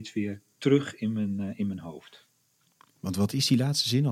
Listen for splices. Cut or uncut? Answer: uncut